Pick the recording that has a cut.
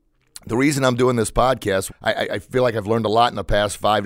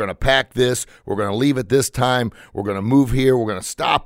first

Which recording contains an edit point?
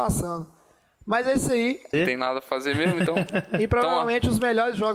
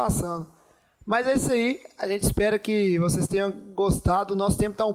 first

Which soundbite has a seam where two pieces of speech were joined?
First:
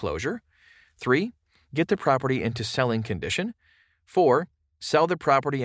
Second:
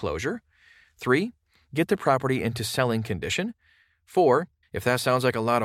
second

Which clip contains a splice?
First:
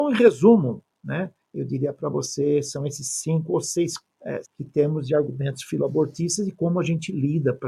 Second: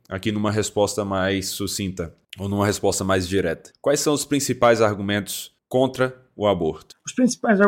first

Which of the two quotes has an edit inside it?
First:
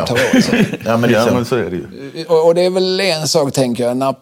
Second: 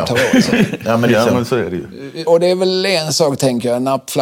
second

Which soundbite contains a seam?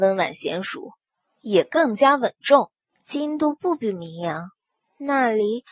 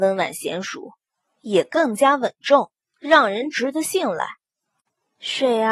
first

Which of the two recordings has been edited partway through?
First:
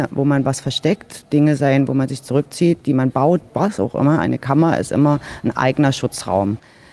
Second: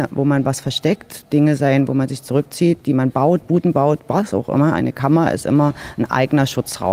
first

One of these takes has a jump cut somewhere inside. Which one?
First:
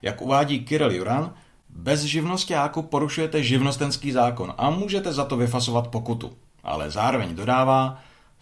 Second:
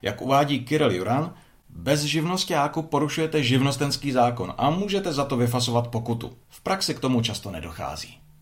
second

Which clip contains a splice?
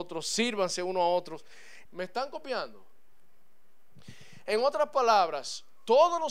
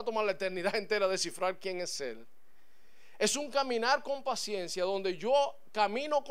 first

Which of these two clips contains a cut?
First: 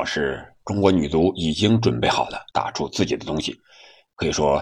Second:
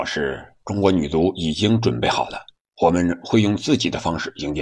first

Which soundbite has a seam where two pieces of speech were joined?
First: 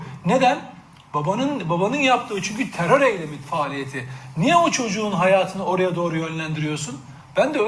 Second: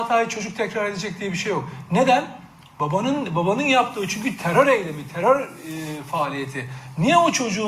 first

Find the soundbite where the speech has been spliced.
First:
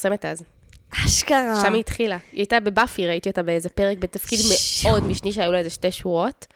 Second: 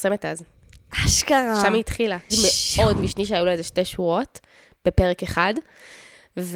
second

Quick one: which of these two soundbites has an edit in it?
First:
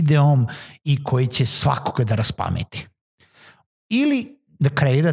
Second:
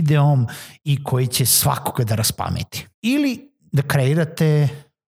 second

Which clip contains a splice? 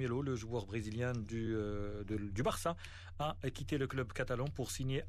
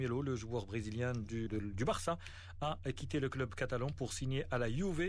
second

